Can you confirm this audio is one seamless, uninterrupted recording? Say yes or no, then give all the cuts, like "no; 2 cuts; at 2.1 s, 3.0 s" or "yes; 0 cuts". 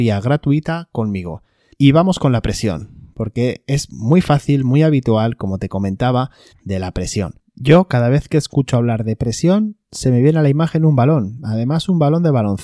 no; 2 cuts; at 1.7 s, 6.5 s